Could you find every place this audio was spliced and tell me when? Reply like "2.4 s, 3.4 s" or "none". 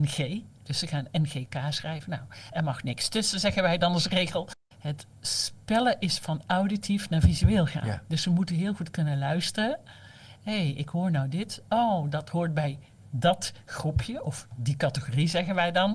none